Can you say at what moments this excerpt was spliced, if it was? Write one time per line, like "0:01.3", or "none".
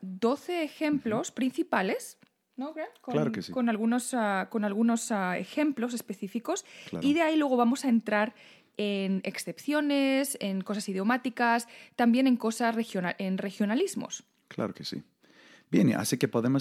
none